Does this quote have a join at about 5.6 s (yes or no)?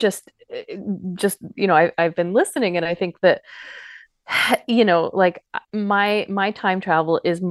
yes